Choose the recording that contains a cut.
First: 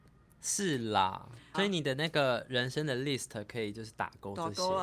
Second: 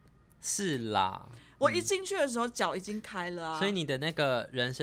first; 1 cut; at 1.5 s

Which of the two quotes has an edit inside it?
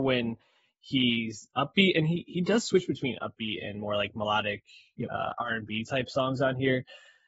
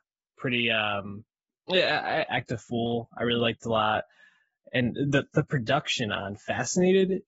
second; 1 cut; at 2.3 s

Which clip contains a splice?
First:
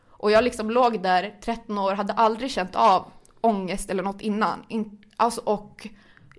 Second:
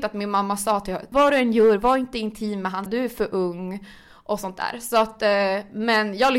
second; 2 cuts; at 1.1 s, 2.9 s

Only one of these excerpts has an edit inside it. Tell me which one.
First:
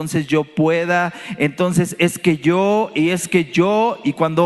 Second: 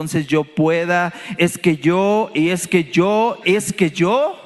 second; 2 cuts; at 1.4 s, 3.4 s

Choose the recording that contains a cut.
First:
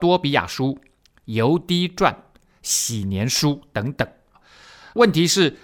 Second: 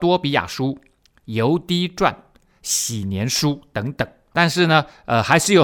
second; 1 cut; at 4.3 s

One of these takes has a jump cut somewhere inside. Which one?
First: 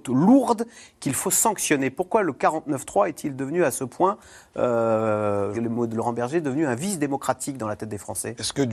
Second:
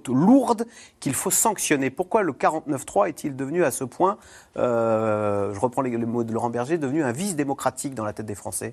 first; 1 cut; at 5.5 s

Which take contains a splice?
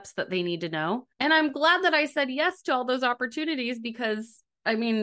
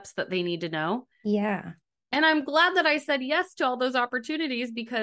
first; 1 cut; at 1.1 s

